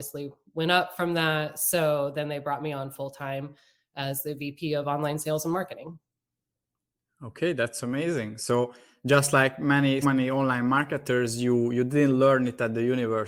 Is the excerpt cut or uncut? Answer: cut